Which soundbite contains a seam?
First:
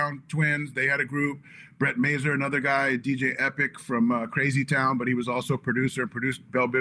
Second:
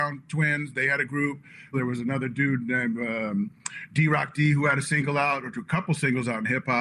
second; 1 cut; at 1.7 s

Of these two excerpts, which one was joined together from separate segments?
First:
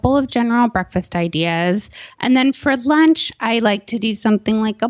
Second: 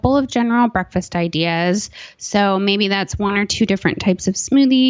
first; 1 cut; at 2.1 s

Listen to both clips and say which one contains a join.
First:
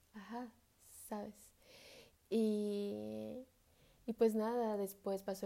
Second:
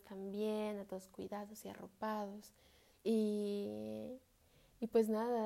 second; 1 cut; at 3.0 s

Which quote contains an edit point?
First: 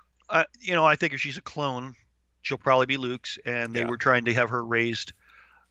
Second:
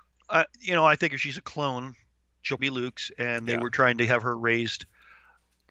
second; 1 cut; at 2.6 s

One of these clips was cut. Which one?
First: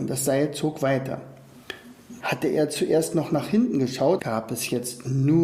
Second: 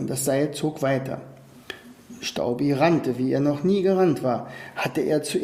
first; 2 cuts; at 2.2 s, 4.2 s

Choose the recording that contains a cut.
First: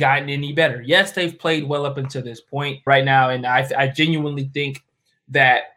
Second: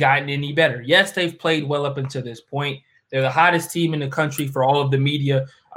first; 1 cut; at 2.9 s

